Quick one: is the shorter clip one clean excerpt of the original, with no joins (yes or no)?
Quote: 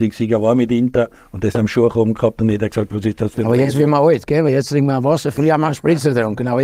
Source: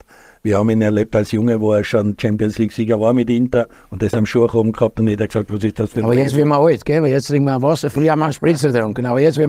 yes